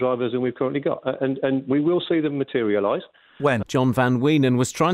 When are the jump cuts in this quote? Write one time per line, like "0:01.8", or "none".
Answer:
0:03.6